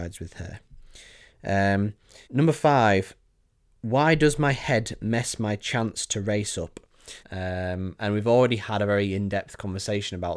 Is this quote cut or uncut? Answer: cut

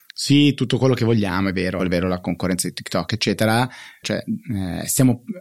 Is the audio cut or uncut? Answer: cut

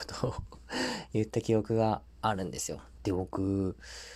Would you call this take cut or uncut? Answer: cut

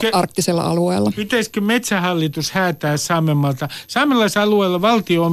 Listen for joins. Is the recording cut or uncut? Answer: uncut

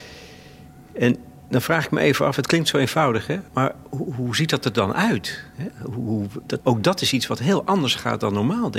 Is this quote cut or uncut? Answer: cut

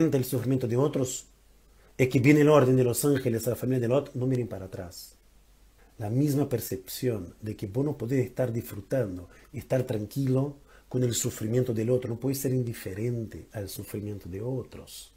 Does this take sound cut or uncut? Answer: cut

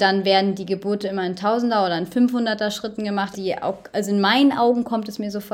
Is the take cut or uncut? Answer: cut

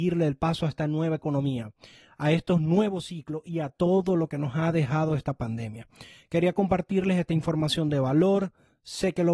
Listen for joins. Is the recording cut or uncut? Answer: uncut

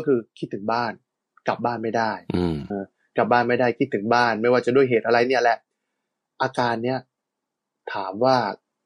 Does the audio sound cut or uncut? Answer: cut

